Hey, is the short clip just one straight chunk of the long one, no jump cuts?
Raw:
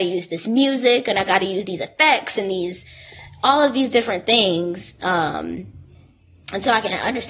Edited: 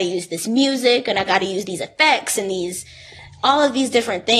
yes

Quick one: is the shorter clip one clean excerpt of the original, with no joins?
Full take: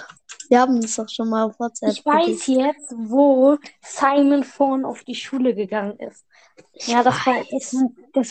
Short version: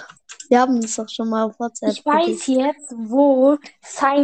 yes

